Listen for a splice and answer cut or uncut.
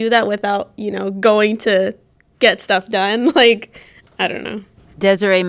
uncut